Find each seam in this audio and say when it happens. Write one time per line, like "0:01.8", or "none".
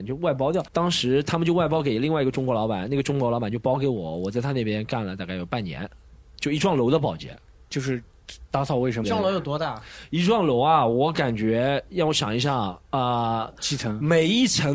0:09.0